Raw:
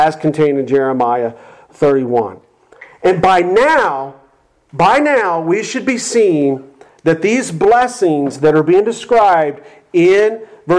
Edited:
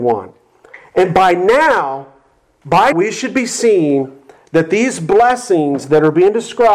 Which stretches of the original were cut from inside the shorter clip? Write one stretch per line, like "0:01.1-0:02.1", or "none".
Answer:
0:05.0-0:05.4